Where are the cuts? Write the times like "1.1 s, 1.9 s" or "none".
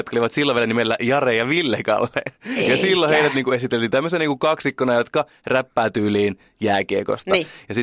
none